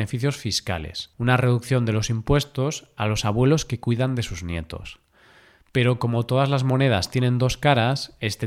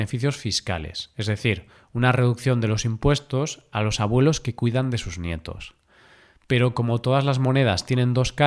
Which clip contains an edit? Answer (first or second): first